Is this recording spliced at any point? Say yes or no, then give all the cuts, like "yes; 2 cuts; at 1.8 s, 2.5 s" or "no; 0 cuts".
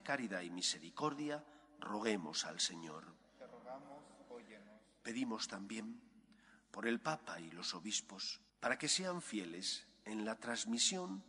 yes; 1 cut; at 8.5 s